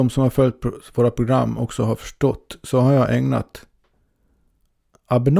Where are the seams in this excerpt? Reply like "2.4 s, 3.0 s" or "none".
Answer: none